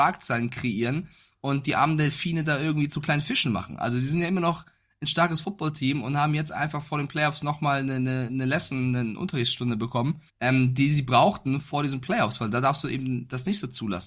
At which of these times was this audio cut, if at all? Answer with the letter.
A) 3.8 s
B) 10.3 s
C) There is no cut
B